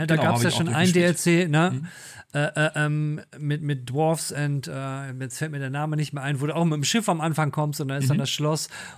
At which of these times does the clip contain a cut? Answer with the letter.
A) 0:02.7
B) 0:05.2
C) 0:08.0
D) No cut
D